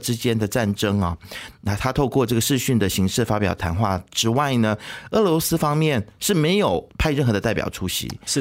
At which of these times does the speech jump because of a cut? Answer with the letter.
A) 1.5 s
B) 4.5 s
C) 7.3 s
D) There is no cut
A